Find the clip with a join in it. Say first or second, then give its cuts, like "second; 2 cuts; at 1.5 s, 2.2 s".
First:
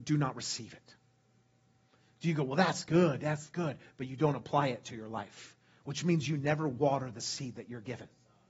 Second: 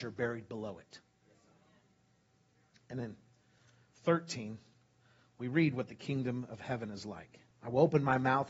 second; 1 cut; at 2.7 s